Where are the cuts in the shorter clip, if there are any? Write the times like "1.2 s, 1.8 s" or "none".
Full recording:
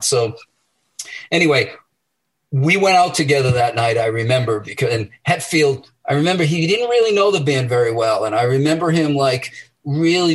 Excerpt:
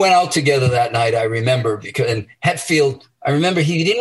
none